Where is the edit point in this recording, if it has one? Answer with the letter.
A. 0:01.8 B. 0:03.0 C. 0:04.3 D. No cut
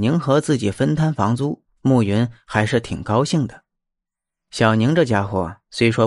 D